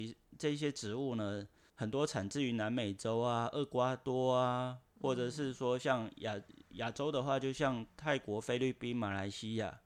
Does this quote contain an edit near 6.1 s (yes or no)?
no